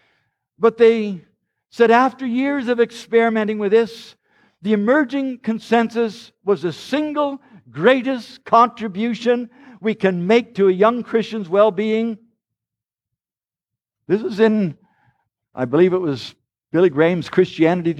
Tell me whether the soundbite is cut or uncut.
uncut